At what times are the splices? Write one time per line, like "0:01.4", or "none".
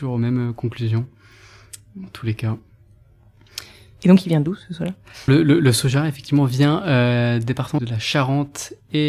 0:05.3
0:07.8